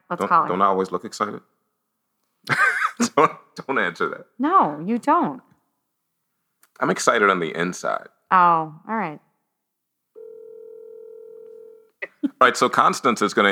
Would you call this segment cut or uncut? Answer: uncut